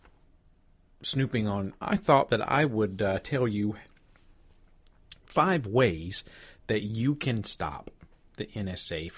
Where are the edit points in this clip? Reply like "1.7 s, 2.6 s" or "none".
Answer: 1.8 s, 5.2 s